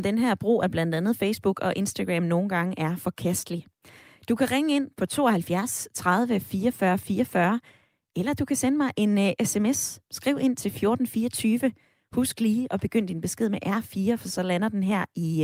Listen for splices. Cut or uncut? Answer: uncut